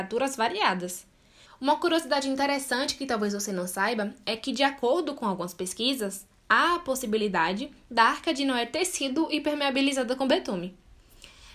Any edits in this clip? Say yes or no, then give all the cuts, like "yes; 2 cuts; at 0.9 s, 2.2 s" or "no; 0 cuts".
yes; 1 cut; at 1.5 s